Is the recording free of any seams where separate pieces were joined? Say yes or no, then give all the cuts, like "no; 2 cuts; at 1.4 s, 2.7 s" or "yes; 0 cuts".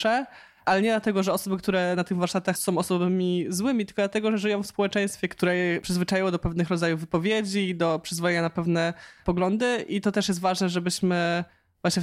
no; 1 cut; at 2.5 s